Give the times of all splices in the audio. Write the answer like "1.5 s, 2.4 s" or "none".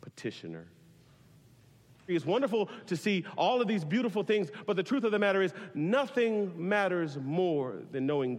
2.1 s